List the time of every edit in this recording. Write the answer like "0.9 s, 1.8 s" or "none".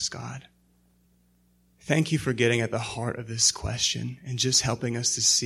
none